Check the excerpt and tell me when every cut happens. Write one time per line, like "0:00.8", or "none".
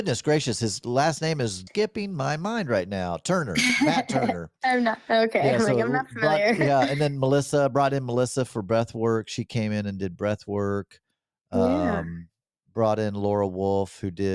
0:01.7